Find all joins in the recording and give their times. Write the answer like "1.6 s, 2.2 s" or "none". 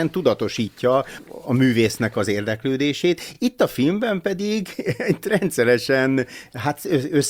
none